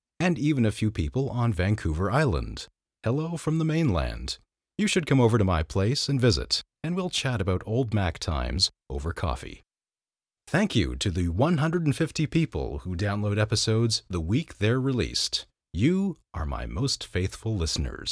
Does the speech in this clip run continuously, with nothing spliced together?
yes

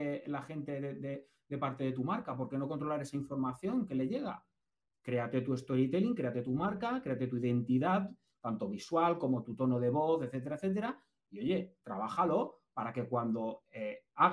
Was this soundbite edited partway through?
no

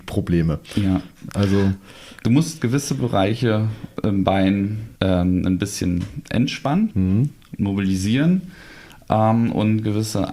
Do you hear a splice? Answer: yes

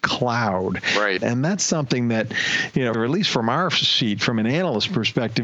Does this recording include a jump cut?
yes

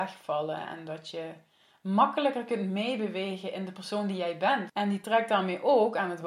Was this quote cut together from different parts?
yes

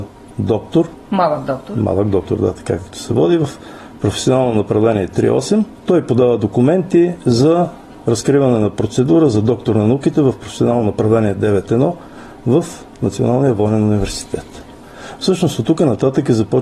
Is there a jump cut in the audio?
no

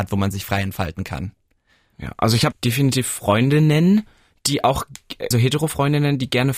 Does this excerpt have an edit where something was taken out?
yes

